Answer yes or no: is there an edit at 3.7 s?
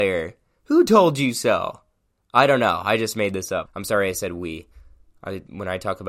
yes